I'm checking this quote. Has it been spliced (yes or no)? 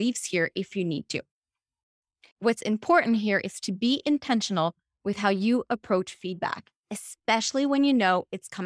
no